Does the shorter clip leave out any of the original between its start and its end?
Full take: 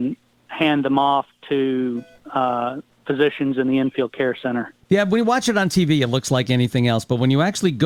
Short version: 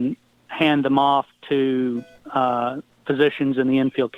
no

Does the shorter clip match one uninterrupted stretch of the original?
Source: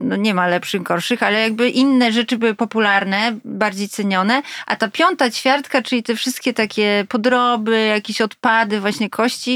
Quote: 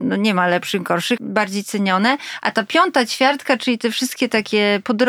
no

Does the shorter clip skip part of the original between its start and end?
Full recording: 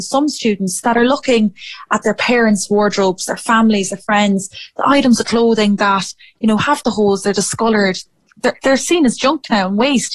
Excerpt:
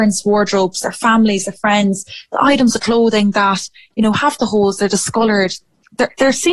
no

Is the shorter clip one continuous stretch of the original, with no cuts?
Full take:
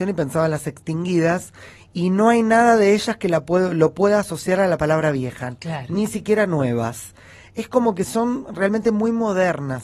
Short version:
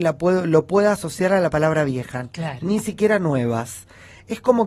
yes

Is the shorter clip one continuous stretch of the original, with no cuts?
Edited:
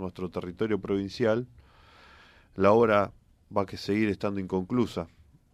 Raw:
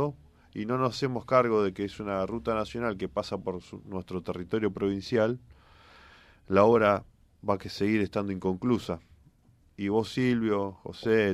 yes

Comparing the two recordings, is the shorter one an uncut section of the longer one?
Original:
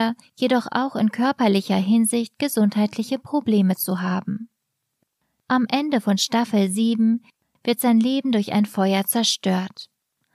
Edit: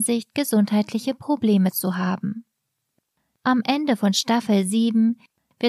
yes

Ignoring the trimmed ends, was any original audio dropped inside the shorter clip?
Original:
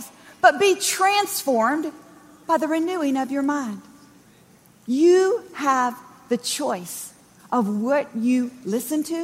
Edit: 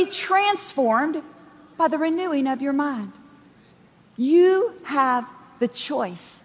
no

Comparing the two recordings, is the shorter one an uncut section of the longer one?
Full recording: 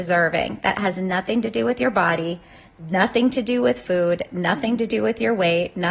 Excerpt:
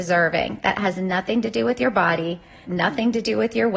no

